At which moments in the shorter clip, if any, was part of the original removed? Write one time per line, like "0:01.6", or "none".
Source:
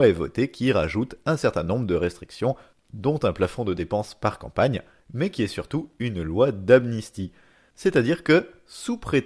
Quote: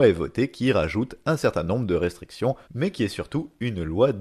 0:02.7